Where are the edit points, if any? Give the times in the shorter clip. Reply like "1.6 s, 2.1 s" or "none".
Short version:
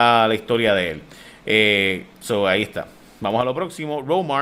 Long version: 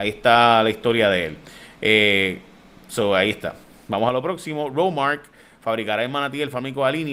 2.1 s